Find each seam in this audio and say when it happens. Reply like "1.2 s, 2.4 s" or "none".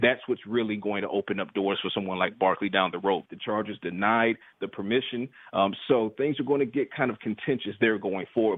3.3 s